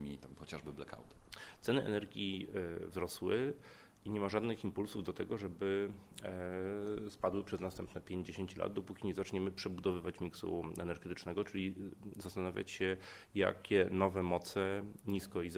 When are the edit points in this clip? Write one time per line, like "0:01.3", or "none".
none